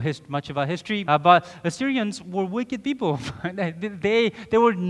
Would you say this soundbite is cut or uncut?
cut